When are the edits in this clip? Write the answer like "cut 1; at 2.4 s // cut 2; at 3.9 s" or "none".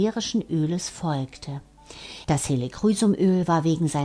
cut 1; at 2.2 s